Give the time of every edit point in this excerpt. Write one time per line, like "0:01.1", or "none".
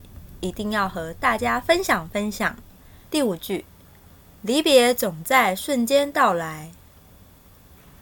0:03.1